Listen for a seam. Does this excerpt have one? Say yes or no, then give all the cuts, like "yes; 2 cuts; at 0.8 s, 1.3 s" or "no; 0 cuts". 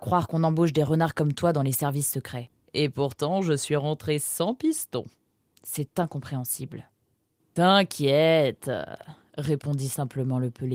yes; 1 cut; at 7.4 s